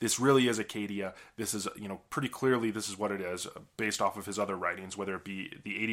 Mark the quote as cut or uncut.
uncut